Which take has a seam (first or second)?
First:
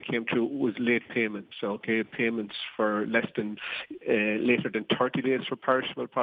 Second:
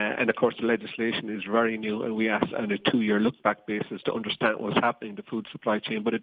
second